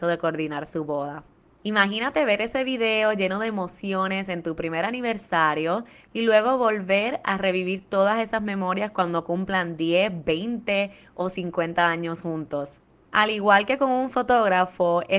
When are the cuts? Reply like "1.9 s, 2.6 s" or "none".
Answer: 1.5 s, 13.1 s